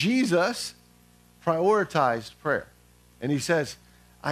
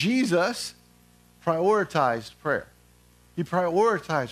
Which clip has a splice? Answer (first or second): first